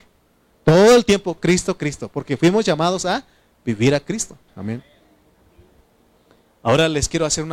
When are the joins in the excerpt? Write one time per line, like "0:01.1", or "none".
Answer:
0:01.4
0:04.5